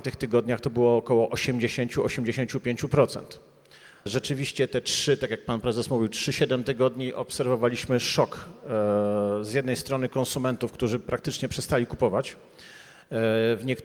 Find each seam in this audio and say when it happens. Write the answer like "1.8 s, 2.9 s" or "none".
4.1 s